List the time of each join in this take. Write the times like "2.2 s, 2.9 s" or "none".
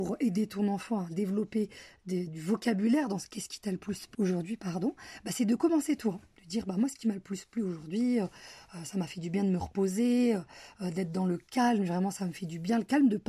4.1 s

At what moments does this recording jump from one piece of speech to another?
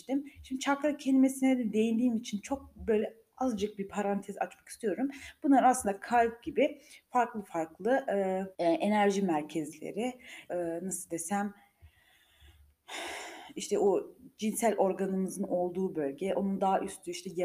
8.5 s, 10.5 s

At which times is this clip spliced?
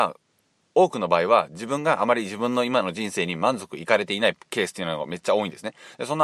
none

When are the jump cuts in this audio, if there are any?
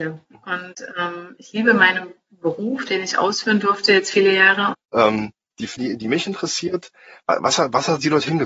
4.7 s, 5.8 s

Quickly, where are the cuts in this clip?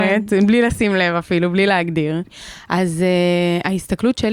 2.2 s

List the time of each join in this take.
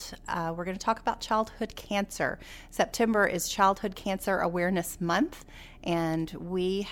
none

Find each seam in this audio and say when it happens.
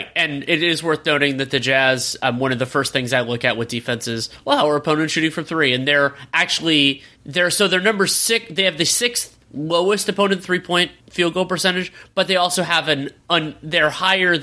none

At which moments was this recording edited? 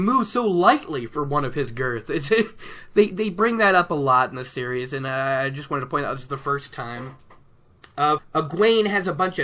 8.2 s

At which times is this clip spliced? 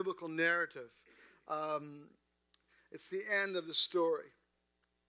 3.1 s

